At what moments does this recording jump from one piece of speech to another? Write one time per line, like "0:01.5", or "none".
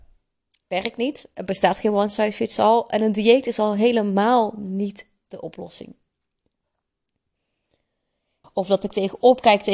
0:08.4

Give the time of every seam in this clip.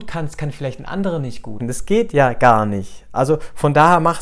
0:01.6

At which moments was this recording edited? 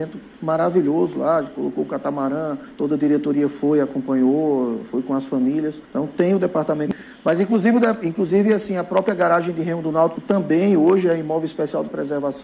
none

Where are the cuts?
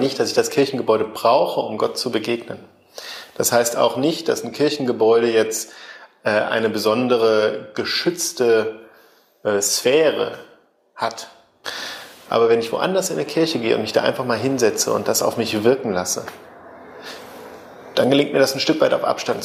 0:12.3

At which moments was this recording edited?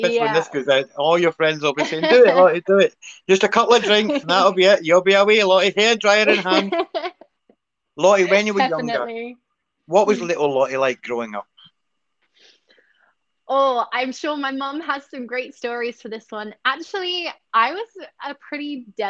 none

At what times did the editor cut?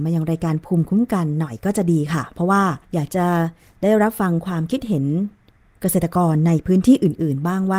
0:02.8

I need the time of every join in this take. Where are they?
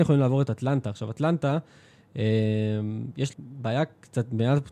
0:03.3

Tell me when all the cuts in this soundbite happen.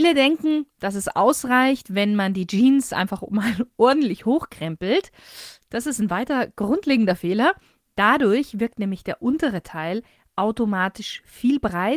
none

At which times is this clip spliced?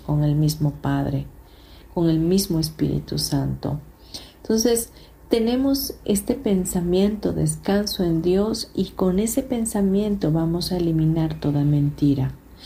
0:06.0

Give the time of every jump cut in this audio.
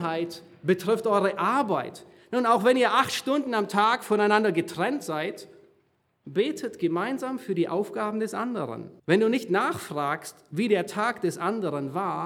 0:09.0

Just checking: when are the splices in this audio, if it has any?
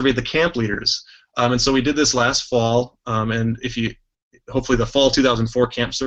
none

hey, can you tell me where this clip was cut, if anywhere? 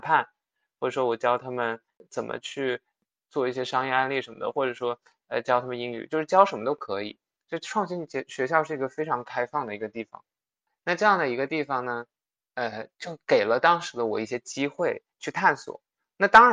none

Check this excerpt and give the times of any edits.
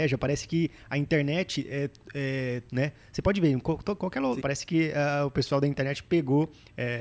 0:02.7
0:04.4

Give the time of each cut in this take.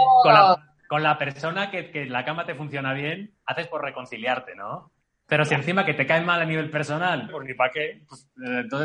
0:05.2
0:07.3

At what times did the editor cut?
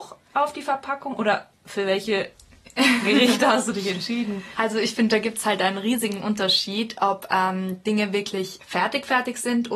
none

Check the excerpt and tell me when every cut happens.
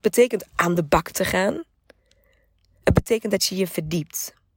none

